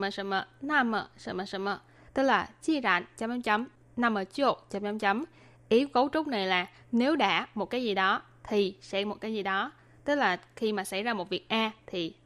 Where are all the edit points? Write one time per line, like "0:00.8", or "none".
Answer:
0:02.1